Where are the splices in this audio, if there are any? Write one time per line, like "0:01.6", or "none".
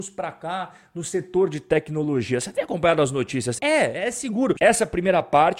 0:03.6
0:04.6